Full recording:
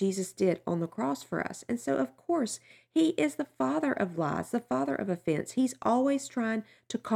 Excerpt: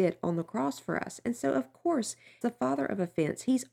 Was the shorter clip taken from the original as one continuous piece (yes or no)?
no